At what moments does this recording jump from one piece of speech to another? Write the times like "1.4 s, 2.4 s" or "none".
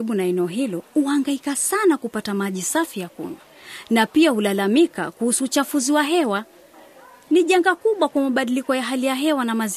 none